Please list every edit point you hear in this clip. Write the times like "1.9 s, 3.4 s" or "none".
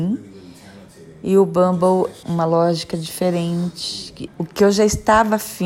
2.2 s, 4.3 s